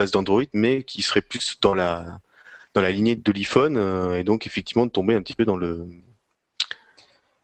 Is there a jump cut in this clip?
yes; 1 cut; at 3.2 s

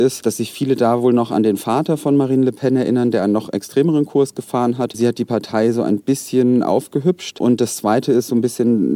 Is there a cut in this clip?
no; 0 cuts

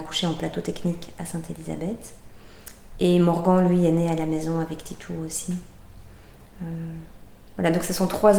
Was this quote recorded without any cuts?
yes; 0 cuts

